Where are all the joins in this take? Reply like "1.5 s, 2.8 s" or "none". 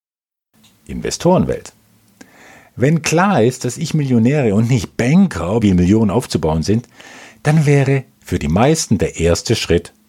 5.6 s